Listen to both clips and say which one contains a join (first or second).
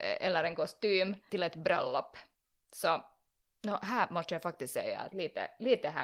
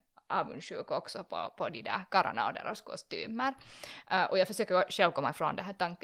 first